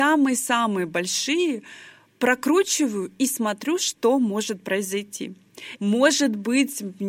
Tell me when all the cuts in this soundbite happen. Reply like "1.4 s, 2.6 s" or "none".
5.8 s